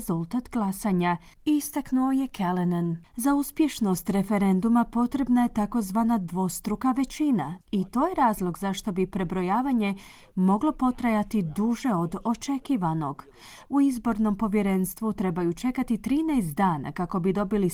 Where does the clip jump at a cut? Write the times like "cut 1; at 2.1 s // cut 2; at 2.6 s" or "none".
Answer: cut 1; at 7.6 s // cut 2; at 13.7 s